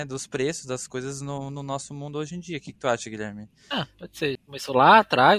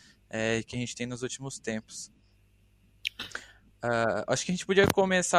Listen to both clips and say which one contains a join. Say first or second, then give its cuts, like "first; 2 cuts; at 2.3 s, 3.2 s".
first; 1 cut; at 4.4 s